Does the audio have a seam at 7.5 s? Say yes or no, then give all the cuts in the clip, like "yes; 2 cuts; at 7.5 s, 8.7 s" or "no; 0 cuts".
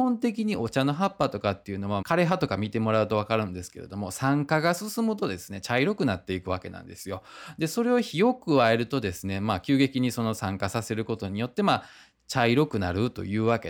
no; 1 cut; at 2.0 s